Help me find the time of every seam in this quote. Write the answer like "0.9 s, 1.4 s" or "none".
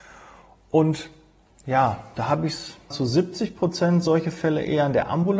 2.9 s

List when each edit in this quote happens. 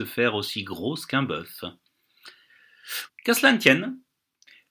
3.1 s

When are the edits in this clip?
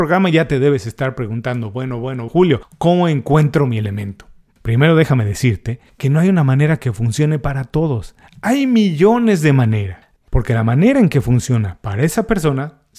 2.3 s, 10.2 s

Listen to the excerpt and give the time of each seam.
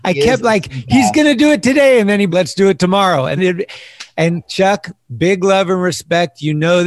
2.3 s, 3.4 s

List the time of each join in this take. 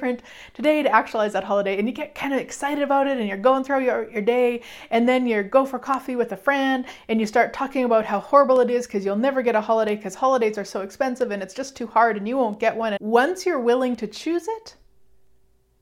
13.0 s

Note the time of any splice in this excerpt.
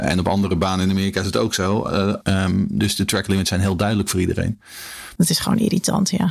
2.2 s, 5.2 s

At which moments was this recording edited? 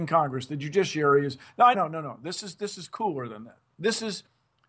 1.7 s

